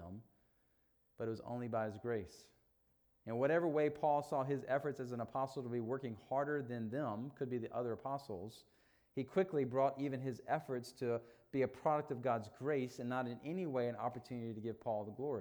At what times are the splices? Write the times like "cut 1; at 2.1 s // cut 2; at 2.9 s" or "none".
none